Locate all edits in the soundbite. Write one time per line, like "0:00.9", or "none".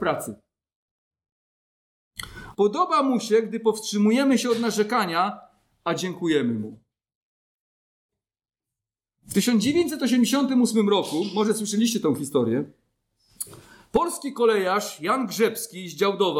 0:02.5